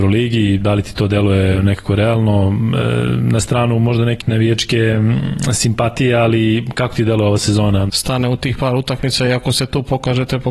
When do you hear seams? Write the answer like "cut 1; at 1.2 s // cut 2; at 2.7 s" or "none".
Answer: cut 1; at 4.2 s // cut 2; at 7.9 s